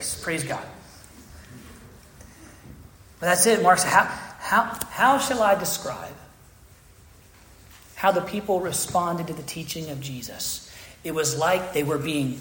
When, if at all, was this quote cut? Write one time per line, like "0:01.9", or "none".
none